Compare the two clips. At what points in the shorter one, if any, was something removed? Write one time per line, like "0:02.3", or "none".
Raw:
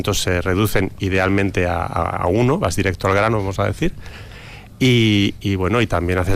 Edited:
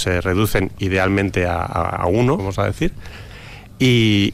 0:02.4

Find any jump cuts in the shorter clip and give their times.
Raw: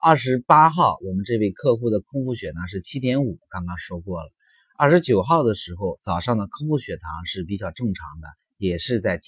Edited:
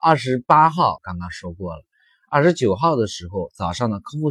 0:01.0

